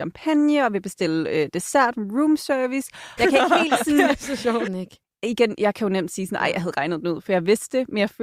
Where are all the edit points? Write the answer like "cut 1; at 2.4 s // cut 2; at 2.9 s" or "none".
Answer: cut 1; at 3.2 s // cut 2; at 4.7 s